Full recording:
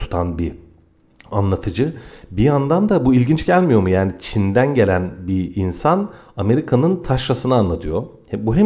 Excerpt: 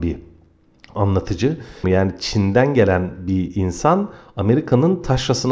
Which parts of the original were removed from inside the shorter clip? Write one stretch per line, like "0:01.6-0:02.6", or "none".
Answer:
0:02.2-0:03.8